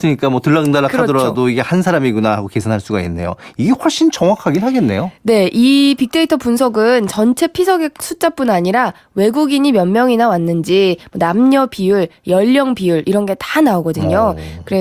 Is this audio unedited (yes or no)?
yes